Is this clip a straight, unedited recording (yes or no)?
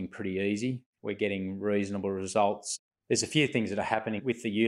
no